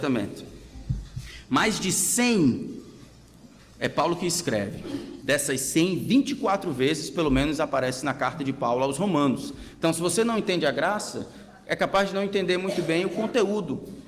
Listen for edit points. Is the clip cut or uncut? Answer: uncut